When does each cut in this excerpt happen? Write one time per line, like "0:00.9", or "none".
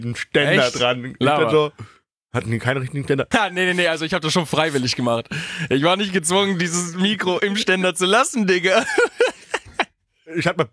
0:03.3